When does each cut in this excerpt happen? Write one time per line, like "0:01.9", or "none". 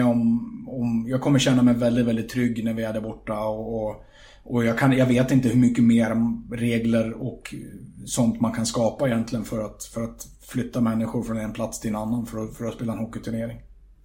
none